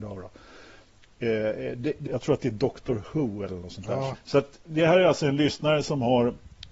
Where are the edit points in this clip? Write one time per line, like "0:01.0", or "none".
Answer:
0:02.1
0:04.1